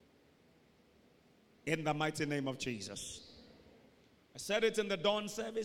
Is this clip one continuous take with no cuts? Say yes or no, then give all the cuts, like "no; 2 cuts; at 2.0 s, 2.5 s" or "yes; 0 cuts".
no; 1 cut; at 1.6 s